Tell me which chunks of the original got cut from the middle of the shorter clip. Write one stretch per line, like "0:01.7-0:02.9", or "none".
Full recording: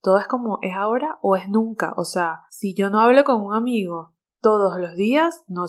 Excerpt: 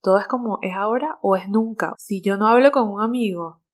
0:01.9-0:02.5